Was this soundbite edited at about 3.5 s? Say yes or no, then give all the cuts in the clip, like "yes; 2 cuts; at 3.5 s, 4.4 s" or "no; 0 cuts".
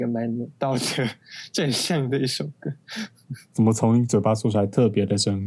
yes; 1 cut; at 3.5 s